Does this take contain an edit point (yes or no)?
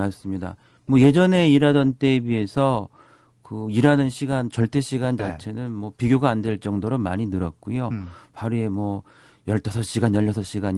no